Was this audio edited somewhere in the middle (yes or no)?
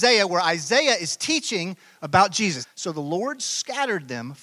yes